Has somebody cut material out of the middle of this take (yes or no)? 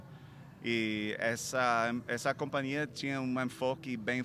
no